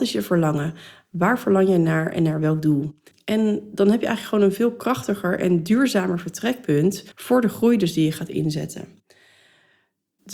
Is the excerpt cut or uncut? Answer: cut